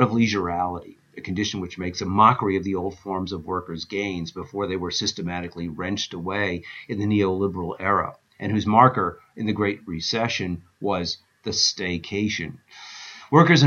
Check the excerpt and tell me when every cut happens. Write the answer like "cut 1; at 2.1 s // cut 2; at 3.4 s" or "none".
none

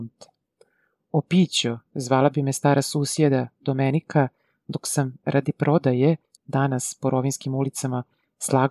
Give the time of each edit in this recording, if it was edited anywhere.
cut 1; at 6.4 s

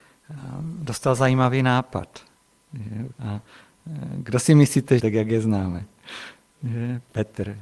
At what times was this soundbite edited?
cut 1; at 3.1 s // cut 2; at 5.0 s

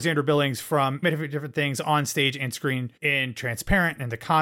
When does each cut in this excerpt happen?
cut 1; at 1.0 s // cut 2; at 3.0 s

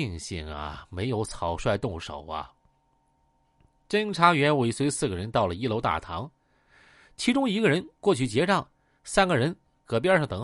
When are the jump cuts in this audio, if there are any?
none

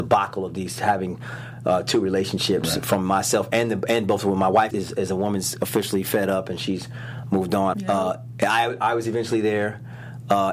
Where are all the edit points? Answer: cut 1; at 4.7 s // cut 2; at 7.7 s

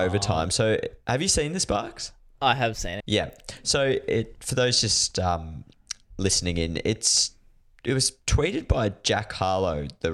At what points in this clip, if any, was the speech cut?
cut 1; at 3.0 s

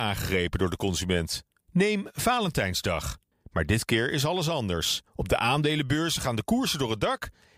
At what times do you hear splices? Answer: cut 1; at 3.3 s // cut 2; at 5.1 s

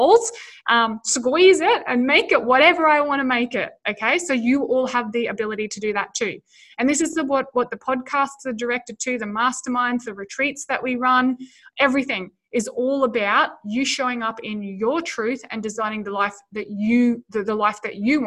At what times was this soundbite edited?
none

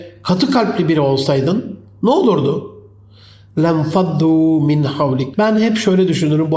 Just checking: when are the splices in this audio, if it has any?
cut 1; at 5.3 s

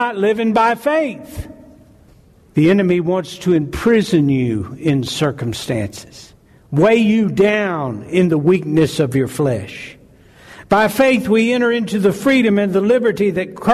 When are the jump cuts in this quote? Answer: none

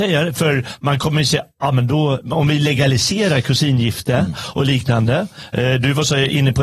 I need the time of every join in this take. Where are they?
none

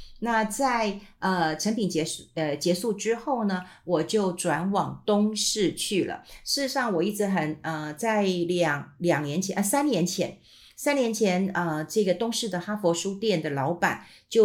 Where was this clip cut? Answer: none

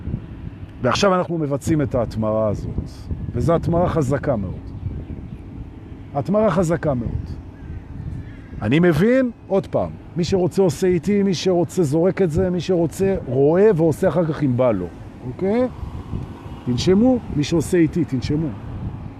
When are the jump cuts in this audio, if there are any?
none

